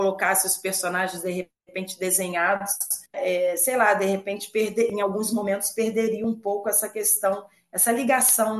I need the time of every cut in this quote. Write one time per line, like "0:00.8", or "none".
0:03.1